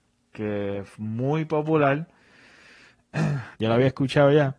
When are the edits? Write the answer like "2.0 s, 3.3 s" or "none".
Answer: 3.5 s